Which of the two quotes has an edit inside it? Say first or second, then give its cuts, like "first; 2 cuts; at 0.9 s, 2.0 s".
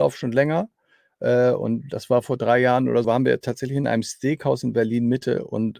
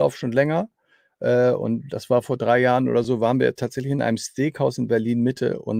first; 1 cut; at 3.0 s